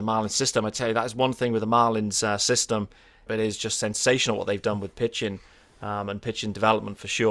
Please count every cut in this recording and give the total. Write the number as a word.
one